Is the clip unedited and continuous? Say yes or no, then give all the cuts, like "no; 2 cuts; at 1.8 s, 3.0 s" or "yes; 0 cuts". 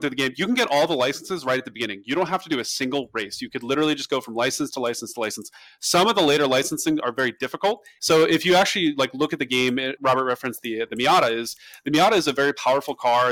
no; 2 cuts; at 8.0 s, 10.0 s